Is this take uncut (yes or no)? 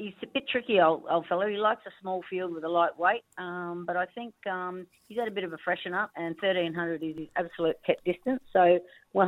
yes